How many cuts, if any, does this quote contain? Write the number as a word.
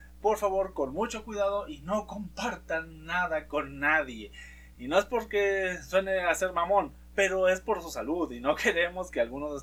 zero